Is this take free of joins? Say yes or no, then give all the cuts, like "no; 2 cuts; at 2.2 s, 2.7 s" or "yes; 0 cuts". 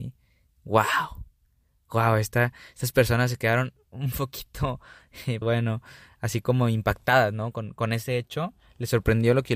no; 1 cut; at 5.4 s